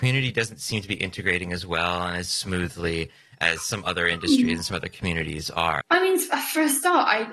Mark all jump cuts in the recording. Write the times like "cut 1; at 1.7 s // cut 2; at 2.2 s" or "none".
cut 1; at 5.8 s